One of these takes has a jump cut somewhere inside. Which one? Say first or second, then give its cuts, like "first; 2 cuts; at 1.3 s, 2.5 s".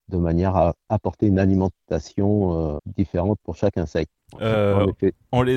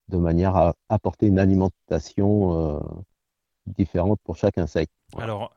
first; 2 cuts; at 2.8 s, 4.4 s